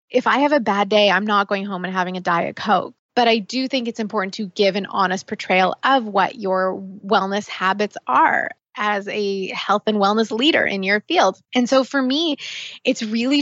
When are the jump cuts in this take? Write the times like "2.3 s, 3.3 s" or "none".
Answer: 3.0 s, 11.4 s